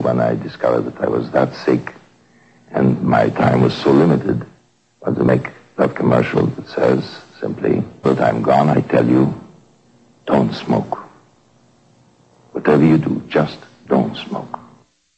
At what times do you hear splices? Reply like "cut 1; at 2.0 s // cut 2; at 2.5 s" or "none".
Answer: cut 1; at 8.0 s